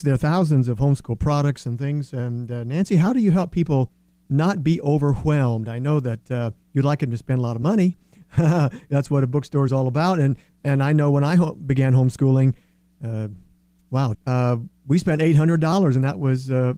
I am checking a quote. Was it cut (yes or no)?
yes